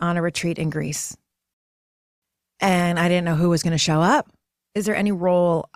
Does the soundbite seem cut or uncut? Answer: cut